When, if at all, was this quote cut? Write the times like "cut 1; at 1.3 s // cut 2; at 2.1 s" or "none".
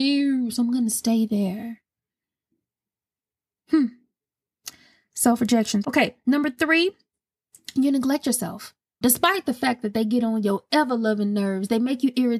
cut 1; at 5.8 s // cut 2; at 9.0 s

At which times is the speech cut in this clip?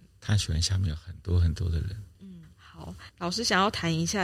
cut 1; at 2.1 s

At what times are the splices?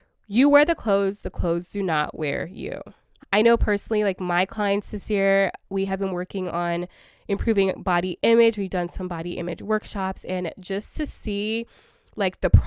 cut 1; at 3.2 s

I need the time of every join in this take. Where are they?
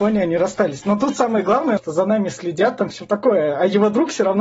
cut 1; at 1.8 s

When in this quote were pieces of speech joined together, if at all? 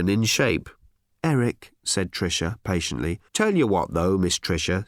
cut 1; at 1.1 s // cut 2; at 3.3 s

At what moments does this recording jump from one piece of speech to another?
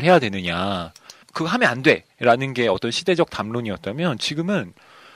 cut 1; at 1.2 s

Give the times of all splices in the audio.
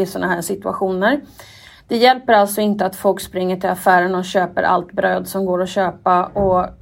none

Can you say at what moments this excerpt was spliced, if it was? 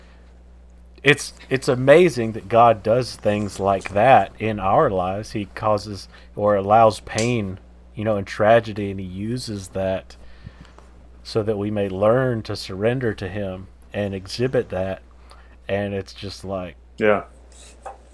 none

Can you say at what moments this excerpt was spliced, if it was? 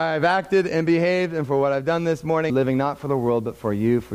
cut 1; at 2.5 s

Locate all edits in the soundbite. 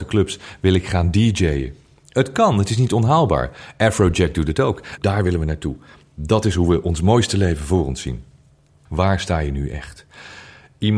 cut 1; at 5.0 s // cut 2; at 8.9 s

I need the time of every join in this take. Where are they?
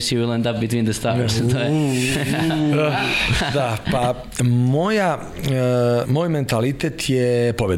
cut 1; at 6.0 s

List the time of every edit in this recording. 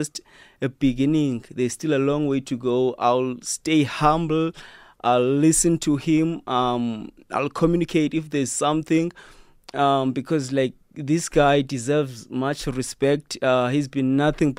none

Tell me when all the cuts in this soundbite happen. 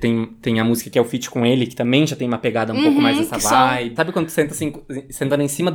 cut 1; at 4.0 s

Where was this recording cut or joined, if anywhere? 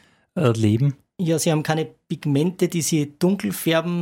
none

